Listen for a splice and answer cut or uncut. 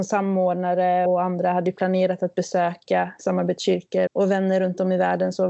cut